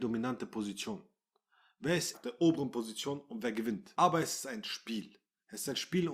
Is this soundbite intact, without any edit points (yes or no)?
no